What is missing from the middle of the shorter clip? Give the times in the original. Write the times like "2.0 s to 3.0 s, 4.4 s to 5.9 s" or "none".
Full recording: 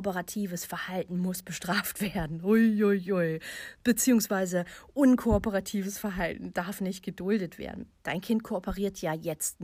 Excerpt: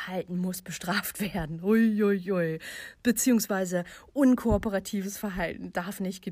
none

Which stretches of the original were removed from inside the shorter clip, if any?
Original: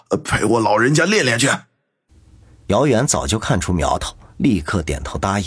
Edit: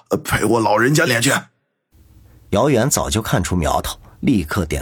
1.1 s to 1.2 s

